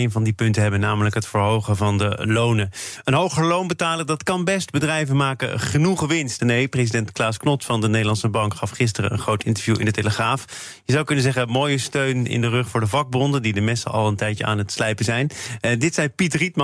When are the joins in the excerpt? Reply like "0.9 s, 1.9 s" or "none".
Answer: 6.4 s